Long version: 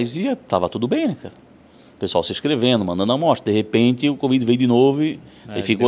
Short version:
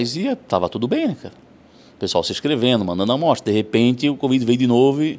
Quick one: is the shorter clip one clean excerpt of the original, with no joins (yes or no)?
yes